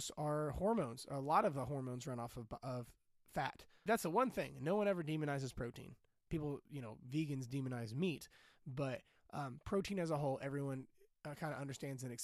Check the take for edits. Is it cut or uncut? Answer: cut